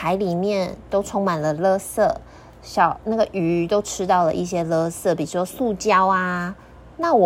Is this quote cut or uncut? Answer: uncut